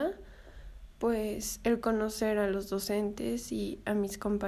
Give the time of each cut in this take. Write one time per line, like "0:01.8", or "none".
none